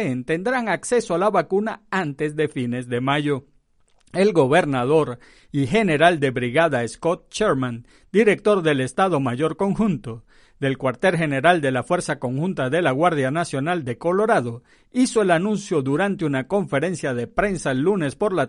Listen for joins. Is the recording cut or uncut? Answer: uncut